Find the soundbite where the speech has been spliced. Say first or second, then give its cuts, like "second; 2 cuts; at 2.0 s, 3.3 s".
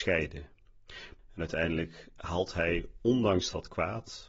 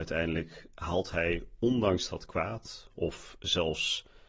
first; 1 cut; at 1.2 s